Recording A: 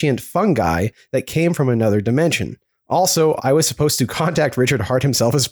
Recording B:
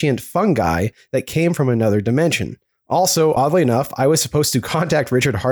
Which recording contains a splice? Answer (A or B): A